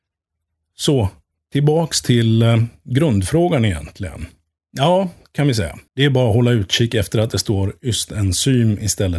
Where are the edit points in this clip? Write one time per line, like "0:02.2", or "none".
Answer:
0:04.6
0:05.9